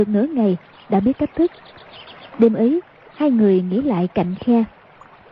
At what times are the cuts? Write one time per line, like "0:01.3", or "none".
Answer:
0:02.3